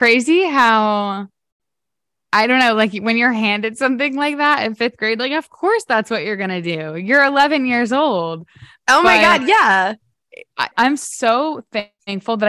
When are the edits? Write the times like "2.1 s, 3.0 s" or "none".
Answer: 10.7 s